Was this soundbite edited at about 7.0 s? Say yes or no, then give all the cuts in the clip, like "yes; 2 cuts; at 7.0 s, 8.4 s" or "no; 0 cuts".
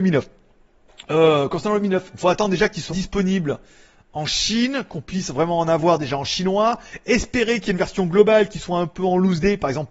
no; 1 cut; at 2.9 s